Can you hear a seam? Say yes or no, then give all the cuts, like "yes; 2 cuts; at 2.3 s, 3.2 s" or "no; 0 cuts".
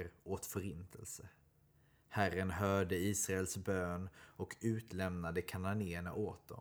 no; 0 cuts